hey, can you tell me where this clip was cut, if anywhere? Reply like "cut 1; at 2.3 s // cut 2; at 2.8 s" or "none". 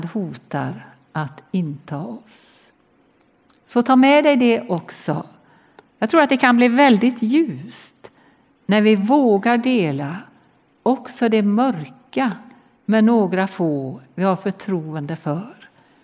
cut 1; at 5.9 s